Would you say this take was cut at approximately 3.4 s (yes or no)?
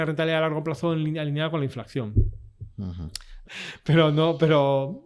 yes